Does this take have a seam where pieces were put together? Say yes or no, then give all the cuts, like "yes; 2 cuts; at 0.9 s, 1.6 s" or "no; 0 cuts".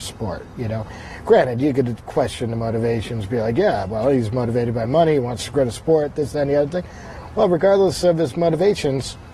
no; 0 cuts